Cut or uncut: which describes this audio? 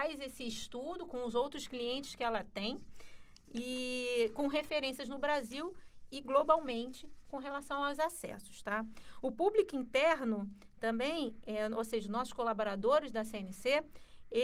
uncut